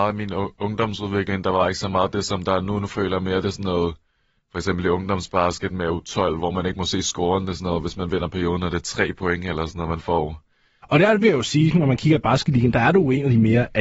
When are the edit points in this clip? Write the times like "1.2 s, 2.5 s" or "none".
10.8 s